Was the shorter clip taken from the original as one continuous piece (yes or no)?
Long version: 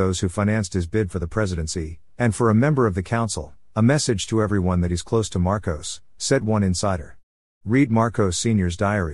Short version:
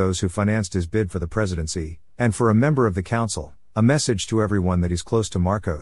yes